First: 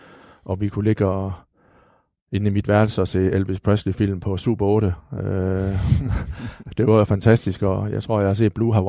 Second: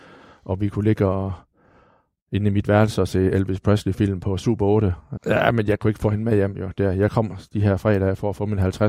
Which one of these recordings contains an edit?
second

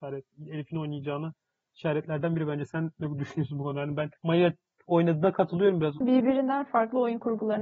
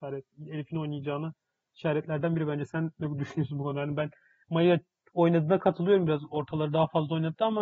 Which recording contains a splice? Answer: first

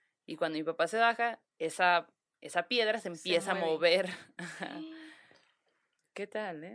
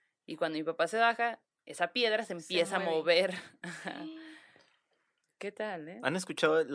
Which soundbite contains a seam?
second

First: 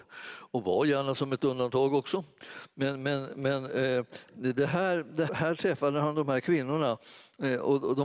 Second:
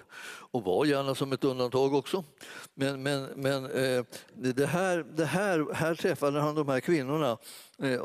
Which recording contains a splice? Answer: first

